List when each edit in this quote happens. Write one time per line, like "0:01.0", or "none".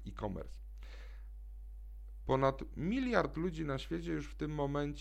0:02.2